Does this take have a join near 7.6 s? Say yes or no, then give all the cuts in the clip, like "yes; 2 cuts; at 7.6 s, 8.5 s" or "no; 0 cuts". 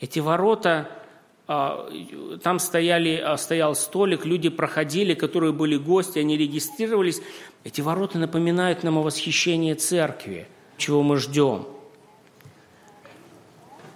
yes; 2 cuts; at 7.6 s, 10.8 s